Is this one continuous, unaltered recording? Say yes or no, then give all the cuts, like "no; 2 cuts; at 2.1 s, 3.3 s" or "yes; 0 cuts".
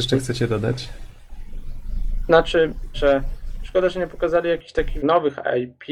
no; 2 cuts; at 2.9 s, 5.0 s